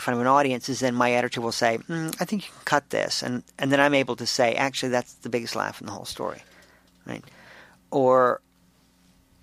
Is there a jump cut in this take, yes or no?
no